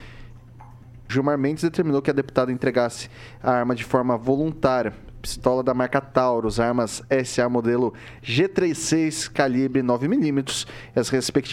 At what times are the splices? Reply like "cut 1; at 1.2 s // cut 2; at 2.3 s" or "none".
cut 1; at 1.1 s